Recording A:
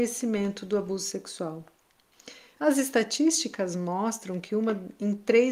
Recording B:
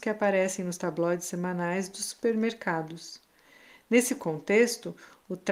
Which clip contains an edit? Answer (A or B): A